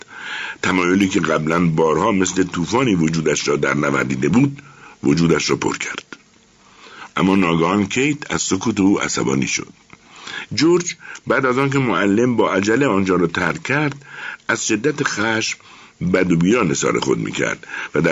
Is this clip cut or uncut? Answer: cut